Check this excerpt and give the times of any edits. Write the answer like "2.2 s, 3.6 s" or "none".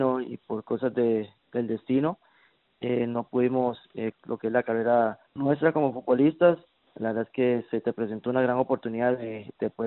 4.1 s, 5.3 s